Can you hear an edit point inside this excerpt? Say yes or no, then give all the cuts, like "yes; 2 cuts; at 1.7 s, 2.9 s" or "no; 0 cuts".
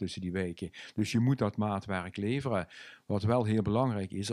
no; 0 cuts